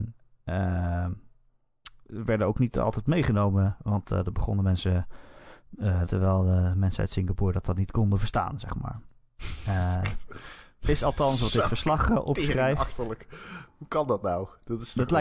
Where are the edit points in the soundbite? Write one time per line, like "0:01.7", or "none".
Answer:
0:06.1